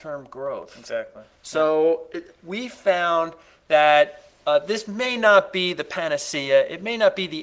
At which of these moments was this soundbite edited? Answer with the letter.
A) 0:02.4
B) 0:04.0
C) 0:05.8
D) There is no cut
D